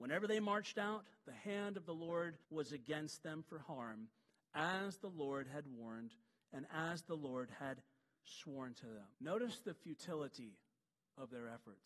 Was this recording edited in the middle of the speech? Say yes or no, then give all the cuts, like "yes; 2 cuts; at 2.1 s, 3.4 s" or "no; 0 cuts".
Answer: yes; 2 cuts; at 2.4 s, 9.1 s